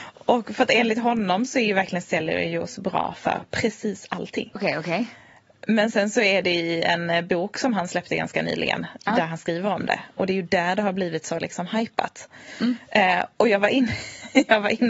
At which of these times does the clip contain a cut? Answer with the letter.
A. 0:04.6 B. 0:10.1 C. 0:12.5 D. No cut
A